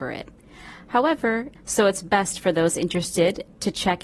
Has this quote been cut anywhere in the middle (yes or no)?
yes